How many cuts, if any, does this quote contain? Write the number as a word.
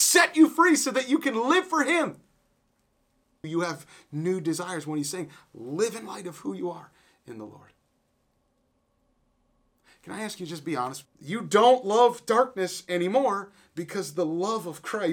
two